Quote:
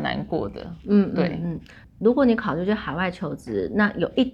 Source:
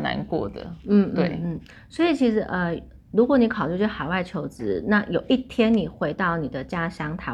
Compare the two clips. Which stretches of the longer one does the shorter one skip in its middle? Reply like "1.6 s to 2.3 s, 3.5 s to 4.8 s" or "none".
1.8 s to 3.0 s